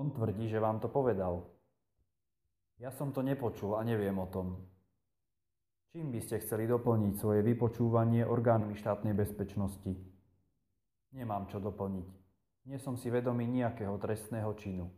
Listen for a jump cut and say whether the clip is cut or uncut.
uncut